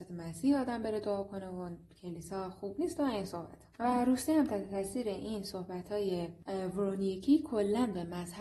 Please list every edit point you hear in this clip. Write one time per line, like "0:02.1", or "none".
0:03.7

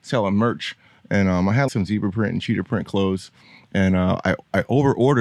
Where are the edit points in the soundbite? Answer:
0:01.7

